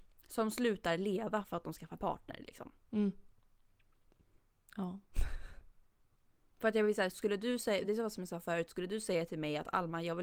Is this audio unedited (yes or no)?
yes